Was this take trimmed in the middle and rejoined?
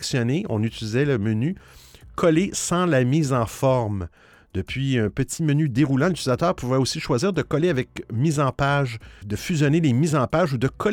yes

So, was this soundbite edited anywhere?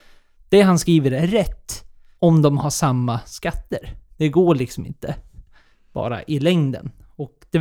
yes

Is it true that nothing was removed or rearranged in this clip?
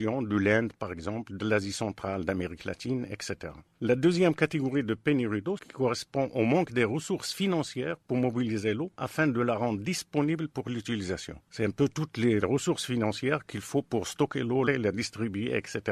no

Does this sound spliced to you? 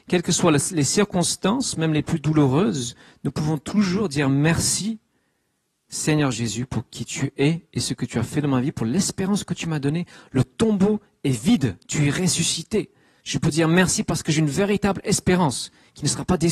no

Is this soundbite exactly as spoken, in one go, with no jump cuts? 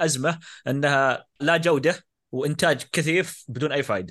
no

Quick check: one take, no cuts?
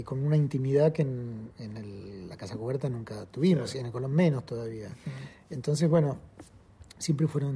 yes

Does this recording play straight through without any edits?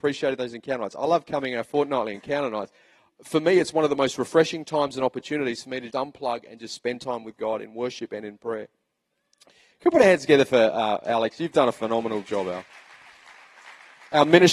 no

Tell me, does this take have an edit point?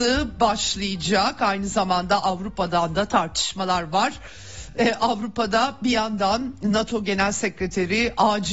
no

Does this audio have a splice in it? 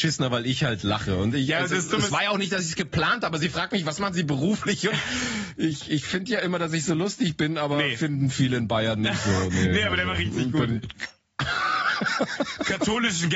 no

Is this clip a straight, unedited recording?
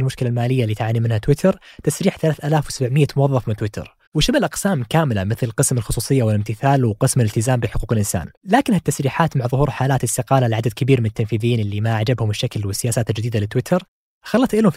no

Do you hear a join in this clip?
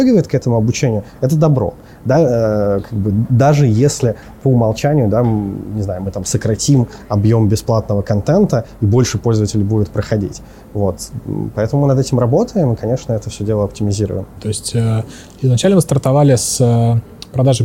yes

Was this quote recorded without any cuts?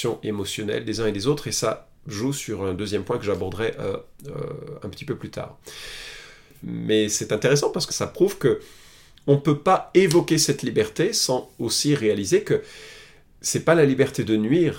no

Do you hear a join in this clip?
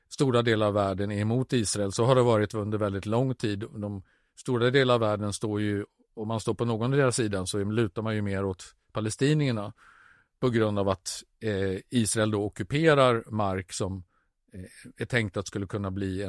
no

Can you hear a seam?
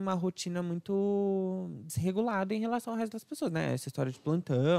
no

